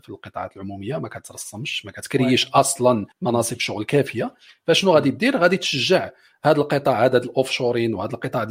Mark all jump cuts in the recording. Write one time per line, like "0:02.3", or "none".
0:03.1

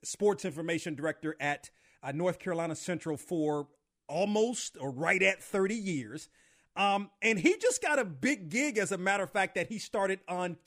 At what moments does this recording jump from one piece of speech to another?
none

